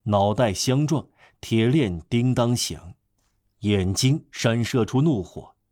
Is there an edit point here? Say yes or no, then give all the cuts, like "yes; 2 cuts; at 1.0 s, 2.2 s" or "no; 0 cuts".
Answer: no; 0 cuts